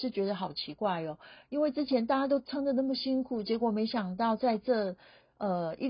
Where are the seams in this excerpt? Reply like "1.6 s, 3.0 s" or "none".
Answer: none